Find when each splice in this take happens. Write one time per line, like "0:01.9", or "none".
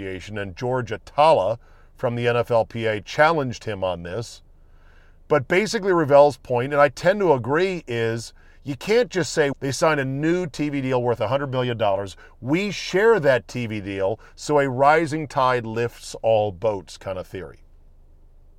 0:09.5